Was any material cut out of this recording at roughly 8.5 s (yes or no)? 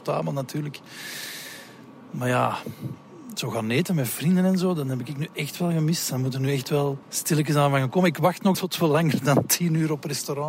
yes